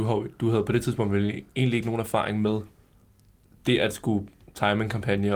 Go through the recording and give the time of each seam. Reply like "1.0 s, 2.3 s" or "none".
none